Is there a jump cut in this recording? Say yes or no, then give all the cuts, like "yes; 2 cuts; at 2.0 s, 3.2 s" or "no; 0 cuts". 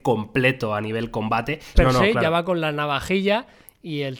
yes; 1 cut; at 1.7 s